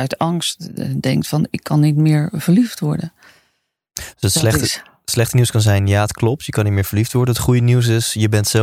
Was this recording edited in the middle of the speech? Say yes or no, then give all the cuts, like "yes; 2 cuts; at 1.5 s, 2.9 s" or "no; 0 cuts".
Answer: no; 0 cuts